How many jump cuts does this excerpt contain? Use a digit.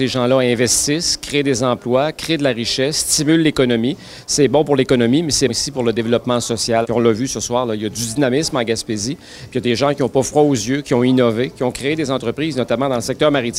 2